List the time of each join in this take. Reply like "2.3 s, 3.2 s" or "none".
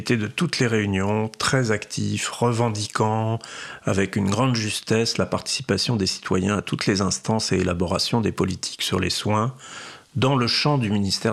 none